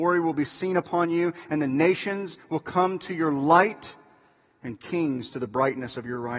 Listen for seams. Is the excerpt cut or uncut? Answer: uncut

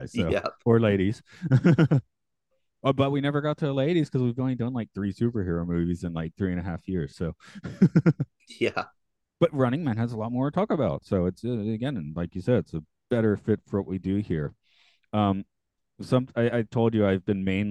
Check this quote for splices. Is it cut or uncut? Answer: uncut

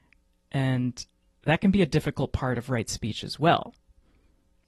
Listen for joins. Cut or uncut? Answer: uncut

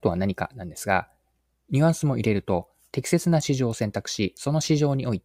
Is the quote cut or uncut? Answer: uncut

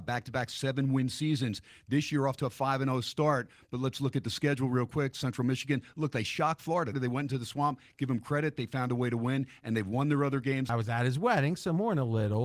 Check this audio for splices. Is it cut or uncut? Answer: cut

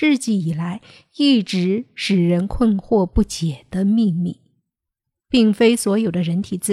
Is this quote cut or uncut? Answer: cut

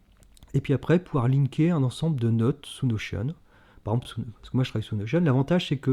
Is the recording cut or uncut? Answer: uncut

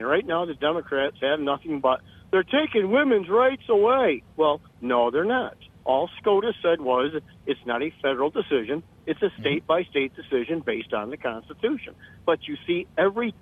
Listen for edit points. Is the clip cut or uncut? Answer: uncut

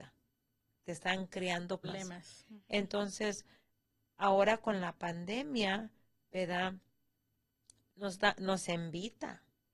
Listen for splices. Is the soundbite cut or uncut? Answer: cut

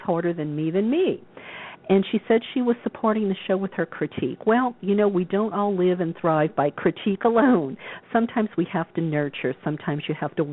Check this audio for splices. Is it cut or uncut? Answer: uncut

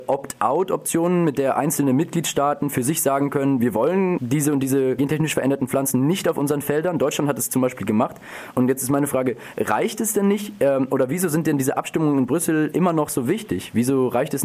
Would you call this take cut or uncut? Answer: uncut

